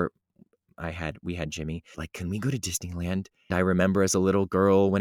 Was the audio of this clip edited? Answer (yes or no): yes